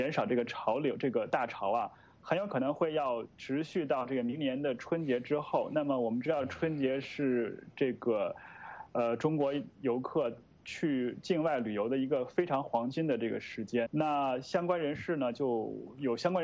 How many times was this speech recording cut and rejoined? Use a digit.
1